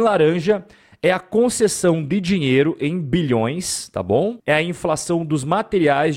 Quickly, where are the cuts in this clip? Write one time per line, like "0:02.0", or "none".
0:04.4